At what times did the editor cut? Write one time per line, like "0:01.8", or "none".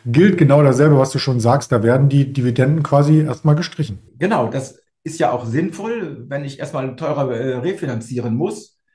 0:04.1